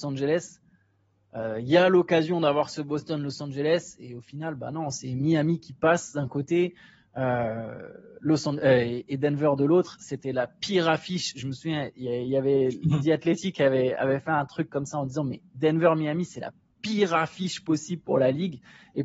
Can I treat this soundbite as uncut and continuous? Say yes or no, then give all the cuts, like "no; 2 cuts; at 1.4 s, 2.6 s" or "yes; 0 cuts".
yes; 0 cuts